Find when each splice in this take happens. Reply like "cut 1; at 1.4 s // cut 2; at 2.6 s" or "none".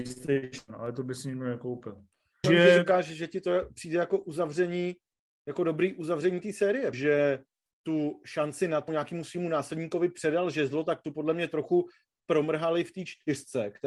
cut 1; at 2.4 s // cut 2; at 6.9 s // cut 3; at 8.9 s